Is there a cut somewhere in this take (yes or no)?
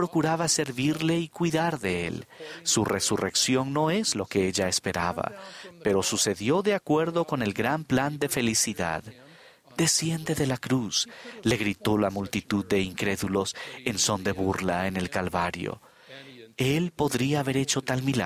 no